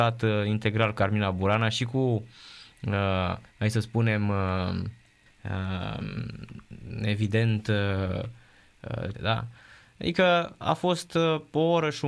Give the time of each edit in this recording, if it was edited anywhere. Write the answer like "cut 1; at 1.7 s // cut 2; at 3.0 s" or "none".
cut 1; at 3.5 s // cut 2; at 5.3 s // cut 3; at 9.1 s